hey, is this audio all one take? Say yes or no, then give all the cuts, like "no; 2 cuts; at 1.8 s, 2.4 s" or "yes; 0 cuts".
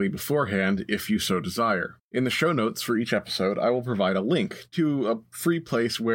no; 1 cut; at 2.0 s